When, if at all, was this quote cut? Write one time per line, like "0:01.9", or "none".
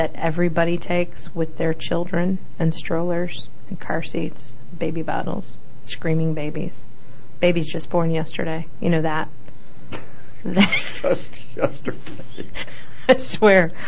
none